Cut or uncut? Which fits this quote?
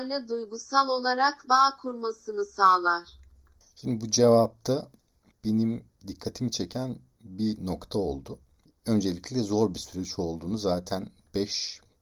uncut